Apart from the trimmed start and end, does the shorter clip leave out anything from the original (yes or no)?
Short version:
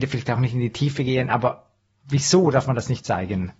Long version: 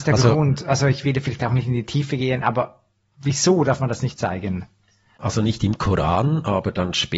no